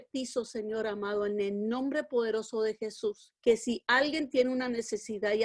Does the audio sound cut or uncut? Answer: cut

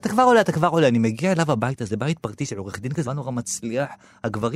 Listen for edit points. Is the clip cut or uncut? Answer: cut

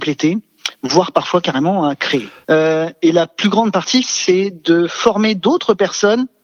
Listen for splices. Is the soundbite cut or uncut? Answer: cut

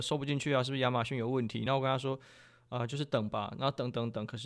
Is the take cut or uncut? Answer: uncut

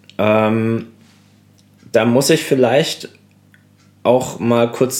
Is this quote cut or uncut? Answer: uncut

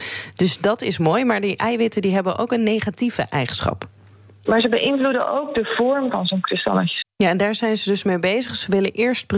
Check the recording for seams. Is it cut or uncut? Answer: cut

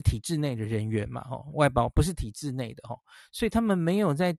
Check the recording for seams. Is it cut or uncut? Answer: cut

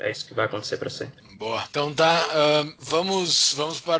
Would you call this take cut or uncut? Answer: uncut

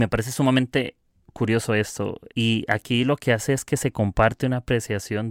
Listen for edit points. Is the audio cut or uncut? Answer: cut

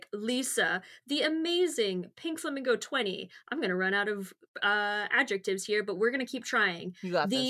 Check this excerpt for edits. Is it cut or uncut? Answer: uncut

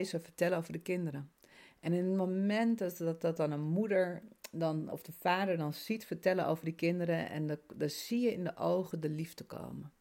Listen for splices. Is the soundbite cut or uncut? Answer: uncut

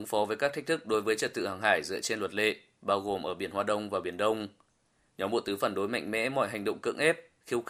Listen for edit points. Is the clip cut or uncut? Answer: uncut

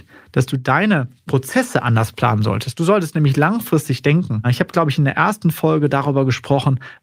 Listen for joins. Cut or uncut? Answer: uncut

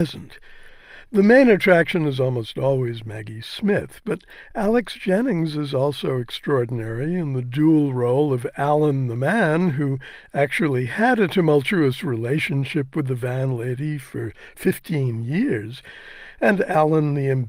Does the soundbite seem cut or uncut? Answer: uncut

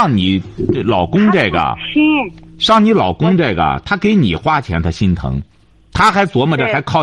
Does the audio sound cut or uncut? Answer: uncut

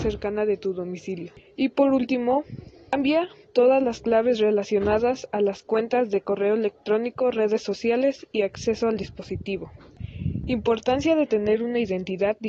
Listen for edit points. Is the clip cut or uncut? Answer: uncut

